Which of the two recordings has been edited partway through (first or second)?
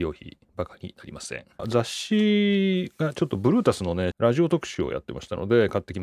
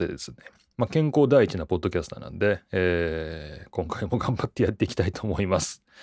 first